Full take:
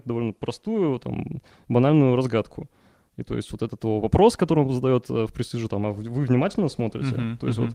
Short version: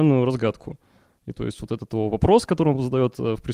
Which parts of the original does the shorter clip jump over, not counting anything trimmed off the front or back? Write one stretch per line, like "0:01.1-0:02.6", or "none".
none

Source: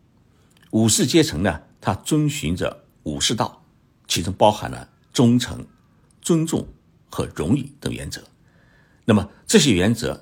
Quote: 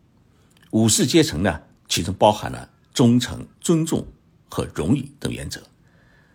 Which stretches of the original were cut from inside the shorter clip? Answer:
0:01.8-0:04.0
0:05.7-0:06.1

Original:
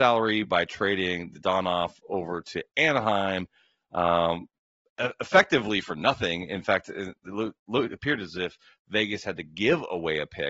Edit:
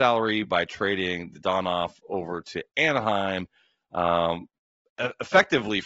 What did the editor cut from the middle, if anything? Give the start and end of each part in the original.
none

